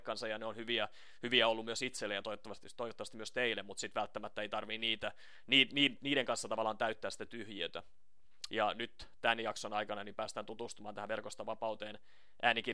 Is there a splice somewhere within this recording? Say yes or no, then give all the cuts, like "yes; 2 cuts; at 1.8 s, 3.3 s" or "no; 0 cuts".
yes; 1 cut; at 8.5 s